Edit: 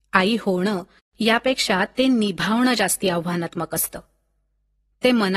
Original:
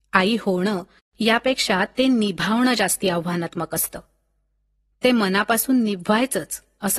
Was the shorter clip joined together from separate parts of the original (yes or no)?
no